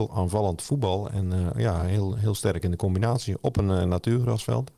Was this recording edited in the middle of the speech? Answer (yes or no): no